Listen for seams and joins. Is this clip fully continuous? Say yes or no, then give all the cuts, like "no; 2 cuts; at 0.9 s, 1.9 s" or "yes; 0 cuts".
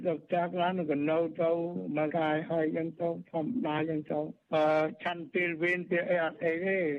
no; 1 cut; at 2.1 s